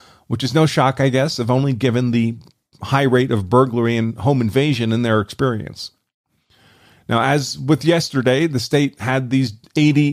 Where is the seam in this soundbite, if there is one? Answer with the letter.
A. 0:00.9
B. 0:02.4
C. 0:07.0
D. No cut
D